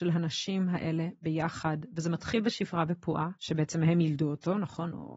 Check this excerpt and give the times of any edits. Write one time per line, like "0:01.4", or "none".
0:03.4